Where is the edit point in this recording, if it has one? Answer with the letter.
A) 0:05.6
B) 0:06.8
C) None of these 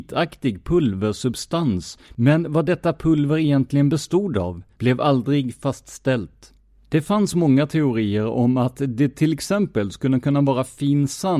B